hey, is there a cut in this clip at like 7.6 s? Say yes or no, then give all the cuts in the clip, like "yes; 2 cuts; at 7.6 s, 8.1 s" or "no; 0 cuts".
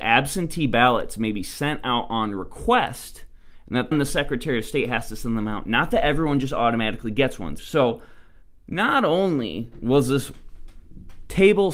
yes; 2 cuts; at 3.9 s, 7.6 s